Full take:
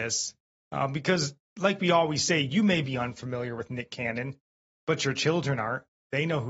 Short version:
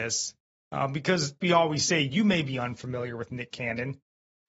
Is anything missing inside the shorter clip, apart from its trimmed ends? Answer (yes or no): yes